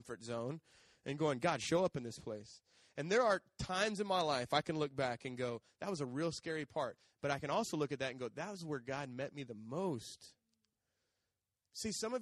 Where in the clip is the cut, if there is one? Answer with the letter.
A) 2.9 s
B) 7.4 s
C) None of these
C